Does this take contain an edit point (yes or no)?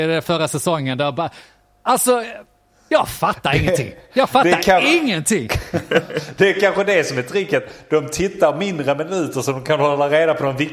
no